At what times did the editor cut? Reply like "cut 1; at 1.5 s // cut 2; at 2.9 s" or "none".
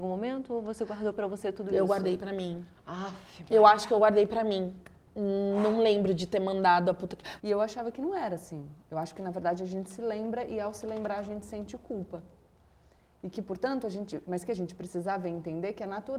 cut 1; at 7.4 s